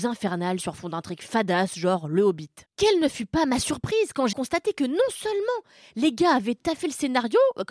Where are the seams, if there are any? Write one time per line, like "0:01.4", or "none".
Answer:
0:02.7
0:04.3